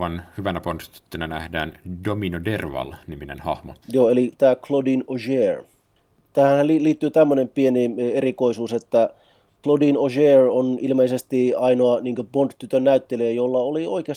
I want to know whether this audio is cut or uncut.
cut